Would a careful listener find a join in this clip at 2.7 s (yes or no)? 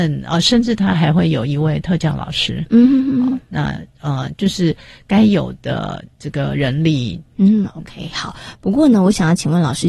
no